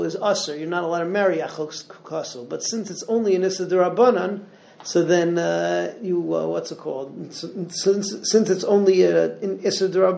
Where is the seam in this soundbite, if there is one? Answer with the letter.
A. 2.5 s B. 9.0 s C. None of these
C